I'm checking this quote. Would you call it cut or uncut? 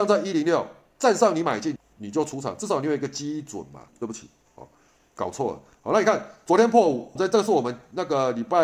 cut